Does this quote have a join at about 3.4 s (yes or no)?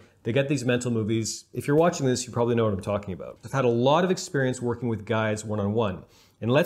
yes